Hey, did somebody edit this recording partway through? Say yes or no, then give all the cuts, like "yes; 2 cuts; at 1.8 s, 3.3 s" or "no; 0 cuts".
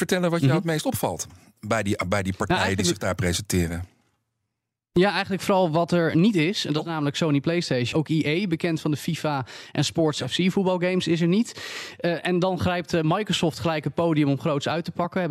yes; 1 cut; at 7.9 s